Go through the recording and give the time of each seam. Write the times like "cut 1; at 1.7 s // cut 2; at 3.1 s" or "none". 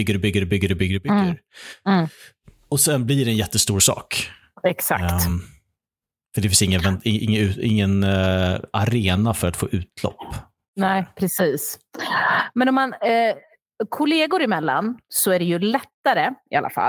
none